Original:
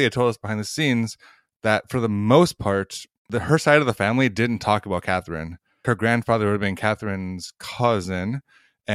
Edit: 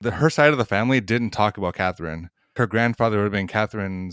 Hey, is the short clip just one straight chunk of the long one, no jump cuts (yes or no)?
yes